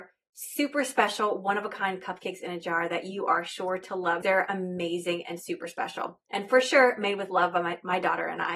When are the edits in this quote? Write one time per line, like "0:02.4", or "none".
0:04.2